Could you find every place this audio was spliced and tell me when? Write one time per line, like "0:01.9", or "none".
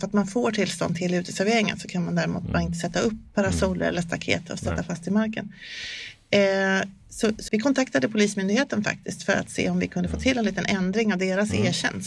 0:07.5